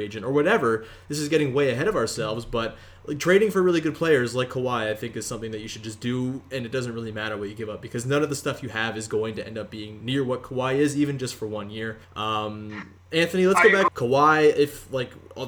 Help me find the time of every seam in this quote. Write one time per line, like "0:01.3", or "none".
0:12.0
0:13.9

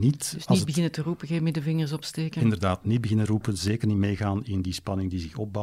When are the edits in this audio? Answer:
none

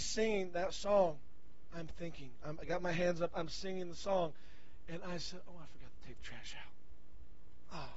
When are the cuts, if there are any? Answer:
none

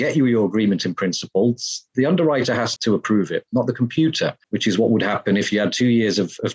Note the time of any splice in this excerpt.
0:02.8
0:04.4

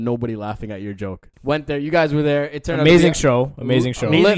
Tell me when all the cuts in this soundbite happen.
0:01.3

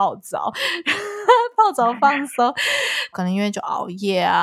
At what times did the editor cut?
0:03.1

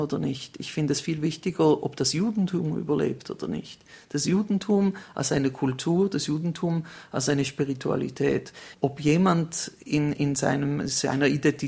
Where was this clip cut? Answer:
0:08.7

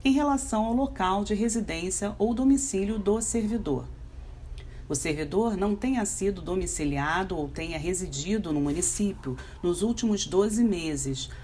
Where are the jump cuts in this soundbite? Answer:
0:04.9

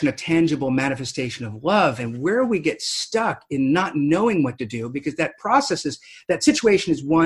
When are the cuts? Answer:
none

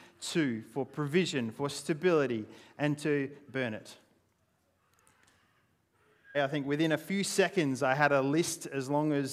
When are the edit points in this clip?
0:06.3

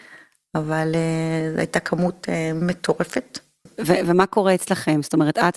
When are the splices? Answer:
0:03.7

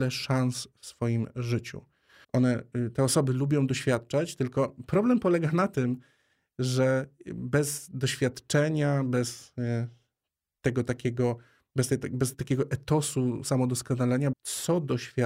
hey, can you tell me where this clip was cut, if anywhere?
0:02.2
0:12.3
0:14.3

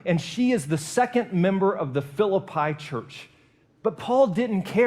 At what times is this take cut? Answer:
0:03.6

